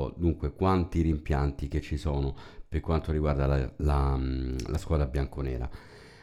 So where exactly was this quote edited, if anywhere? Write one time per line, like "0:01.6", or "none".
none